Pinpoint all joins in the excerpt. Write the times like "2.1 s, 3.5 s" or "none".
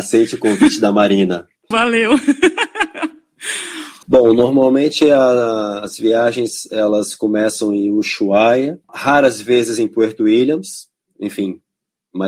1.7 s, 4.0 s, 8.8 s